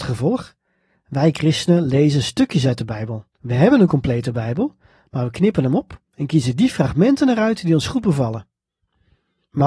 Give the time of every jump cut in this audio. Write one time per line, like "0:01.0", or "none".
0:03.3